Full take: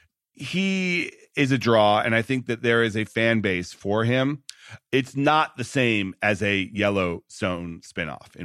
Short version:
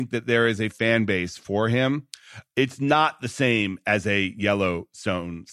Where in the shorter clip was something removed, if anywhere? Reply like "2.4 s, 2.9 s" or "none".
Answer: none